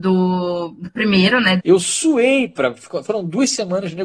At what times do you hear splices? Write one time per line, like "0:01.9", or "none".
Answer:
0:01.6